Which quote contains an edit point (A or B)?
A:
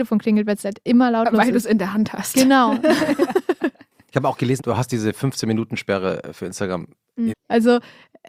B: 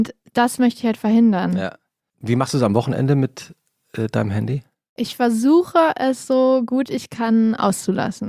A